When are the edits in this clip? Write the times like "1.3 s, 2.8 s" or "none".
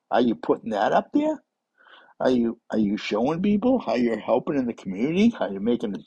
none